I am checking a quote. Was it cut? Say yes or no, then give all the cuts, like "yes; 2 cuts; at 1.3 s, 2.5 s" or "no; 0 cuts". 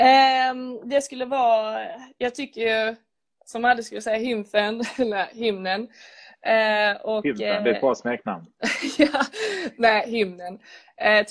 no; 0 cuts